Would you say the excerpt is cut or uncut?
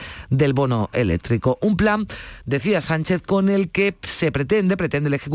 uncut